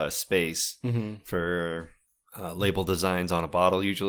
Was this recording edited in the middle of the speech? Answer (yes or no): no